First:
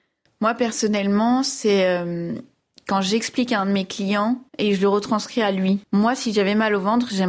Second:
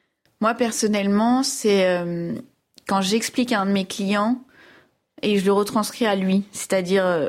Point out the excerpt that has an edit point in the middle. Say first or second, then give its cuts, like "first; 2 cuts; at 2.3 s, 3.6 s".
first; 2 cuts; at 4.5 s, 5.8 s